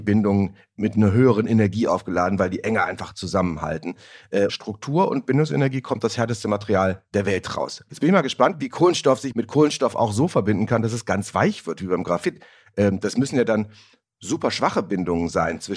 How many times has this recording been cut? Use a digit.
3